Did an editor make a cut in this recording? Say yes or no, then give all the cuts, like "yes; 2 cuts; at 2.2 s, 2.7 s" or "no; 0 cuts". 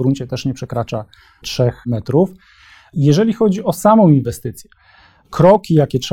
no; 0 cuts